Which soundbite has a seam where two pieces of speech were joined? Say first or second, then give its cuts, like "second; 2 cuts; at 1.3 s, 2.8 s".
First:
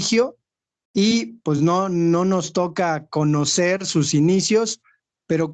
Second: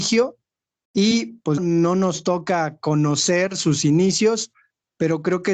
second; 1 cut; at 1.6 s